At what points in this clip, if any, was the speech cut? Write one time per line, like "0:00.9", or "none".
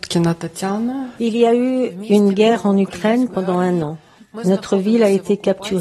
0:01.2

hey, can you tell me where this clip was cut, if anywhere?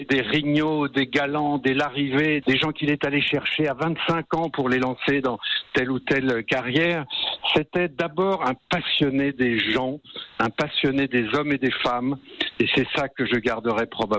0:02.4

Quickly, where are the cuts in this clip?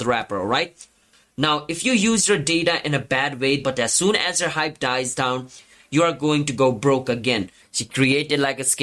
0:03.6
0:07.6

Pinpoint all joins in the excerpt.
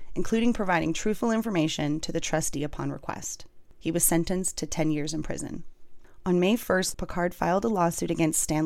0:06.9

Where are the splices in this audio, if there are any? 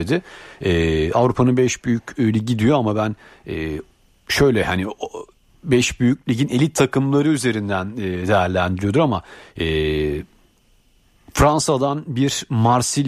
none

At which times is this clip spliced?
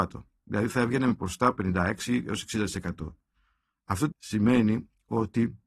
0:04.1

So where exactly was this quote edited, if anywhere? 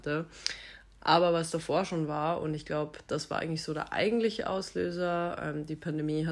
none

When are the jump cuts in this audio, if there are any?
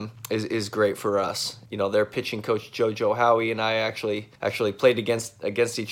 0:01.7
0:04.4

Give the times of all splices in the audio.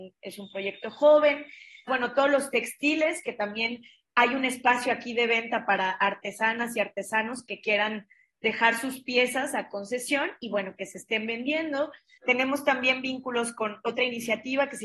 0:01.9
0:12.2
0:13.8

